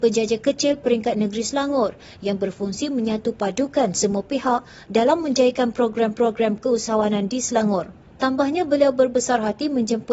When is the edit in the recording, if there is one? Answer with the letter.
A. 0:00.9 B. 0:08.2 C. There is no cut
B